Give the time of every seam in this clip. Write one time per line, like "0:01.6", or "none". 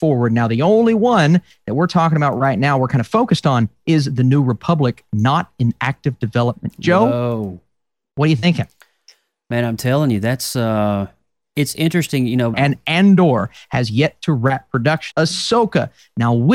0:12.5
0:15.1